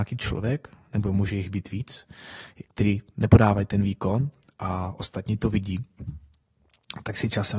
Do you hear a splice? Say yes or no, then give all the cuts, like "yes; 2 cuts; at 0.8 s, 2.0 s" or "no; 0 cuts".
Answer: no; 0 cuts